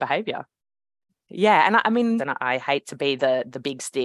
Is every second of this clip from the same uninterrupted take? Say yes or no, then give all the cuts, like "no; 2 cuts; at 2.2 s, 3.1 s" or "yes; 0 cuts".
no; 2 cuts; at 1.1 s, 2.2 s